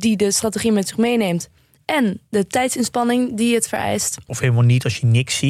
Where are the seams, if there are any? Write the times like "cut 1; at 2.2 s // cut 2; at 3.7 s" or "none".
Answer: cut 1; at 4.3 s